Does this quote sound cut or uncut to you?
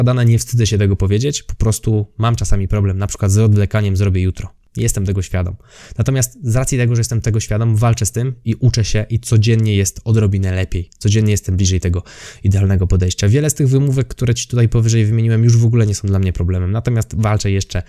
uncut